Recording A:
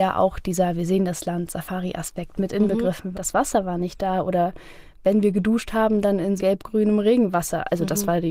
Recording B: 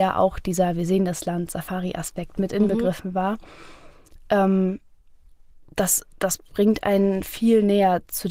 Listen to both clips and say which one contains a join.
A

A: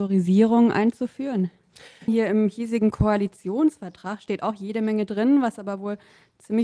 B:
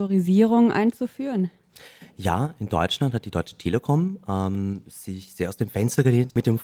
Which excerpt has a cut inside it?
A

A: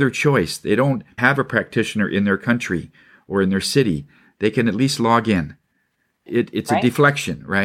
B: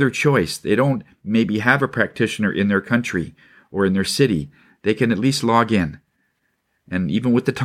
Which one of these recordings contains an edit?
A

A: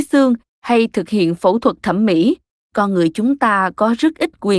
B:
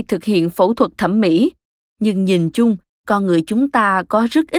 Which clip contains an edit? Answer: A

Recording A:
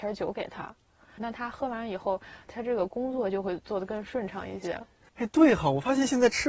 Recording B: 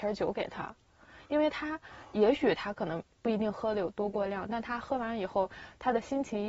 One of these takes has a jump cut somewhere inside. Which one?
A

